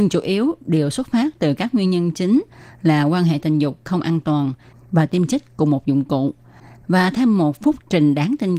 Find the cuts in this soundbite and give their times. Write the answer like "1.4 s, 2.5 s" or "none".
6.8 s